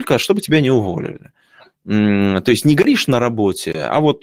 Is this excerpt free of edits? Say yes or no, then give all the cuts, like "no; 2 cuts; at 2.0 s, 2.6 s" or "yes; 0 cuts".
yes; 0 cuts